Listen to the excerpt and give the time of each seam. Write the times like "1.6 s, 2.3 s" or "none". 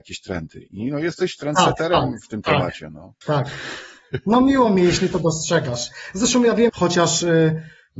3.2 s, 6.7 s